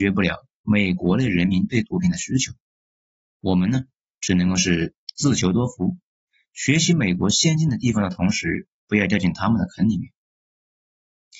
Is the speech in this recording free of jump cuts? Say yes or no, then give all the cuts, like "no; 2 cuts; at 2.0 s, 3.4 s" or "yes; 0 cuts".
no; 1 cut; at 1.0 s